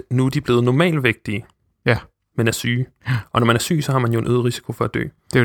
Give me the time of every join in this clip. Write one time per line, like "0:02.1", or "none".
none